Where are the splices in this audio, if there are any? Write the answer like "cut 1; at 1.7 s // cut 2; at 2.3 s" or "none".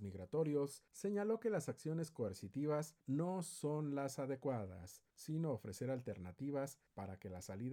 none